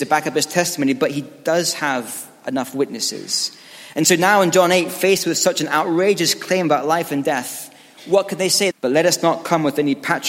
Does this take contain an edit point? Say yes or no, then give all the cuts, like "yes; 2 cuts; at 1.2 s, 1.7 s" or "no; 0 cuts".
yes; 1 cut; at 8.7 s